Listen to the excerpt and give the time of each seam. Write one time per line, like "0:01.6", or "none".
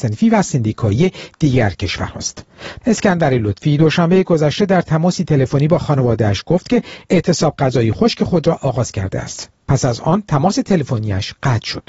0:02.8